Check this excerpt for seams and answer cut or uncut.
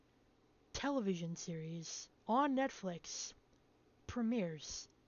cut